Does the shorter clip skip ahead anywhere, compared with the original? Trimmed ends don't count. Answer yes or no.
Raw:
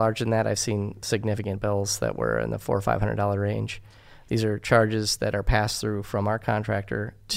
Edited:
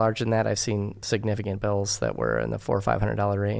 no